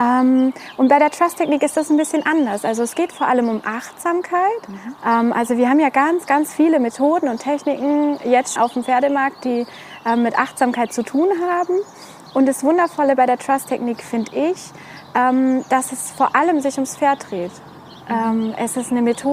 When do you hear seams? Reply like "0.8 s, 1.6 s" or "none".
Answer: 5.0 s, 8.6 s